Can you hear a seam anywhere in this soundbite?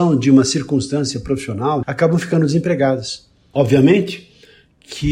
yes; 2 cuts; at 1.8 s, 3.5 s

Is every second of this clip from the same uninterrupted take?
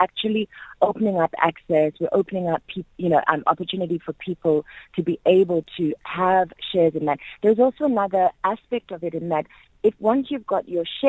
yes; 0 cuts

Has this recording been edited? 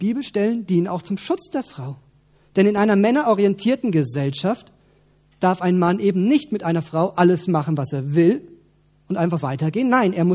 yes; 1 cut; at 9.4 s

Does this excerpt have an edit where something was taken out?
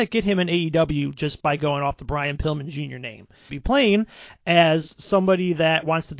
yes; 1 cut; at 3.5 s

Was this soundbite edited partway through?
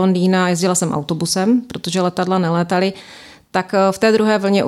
no; 0 cuts

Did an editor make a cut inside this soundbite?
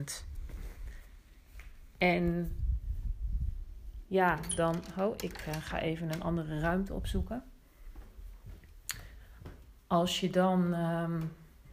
no; 0 cuts

